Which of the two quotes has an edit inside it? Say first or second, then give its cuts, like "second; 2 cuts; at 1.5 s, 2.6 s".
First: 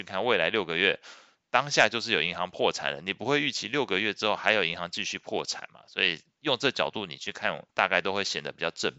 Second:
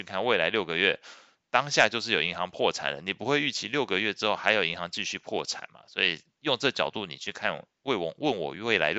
first; 1 cut; at 7.7 s